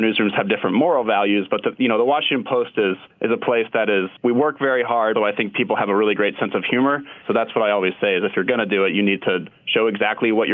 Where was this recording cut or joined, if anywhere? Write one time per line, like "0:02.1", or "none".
0:05.1
0:07.2